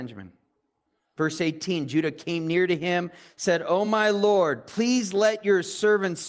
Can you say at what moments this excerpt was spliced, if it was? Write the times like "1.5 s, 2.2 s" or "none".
none